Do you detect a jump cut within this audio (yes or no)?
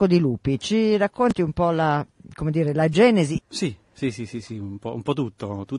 yes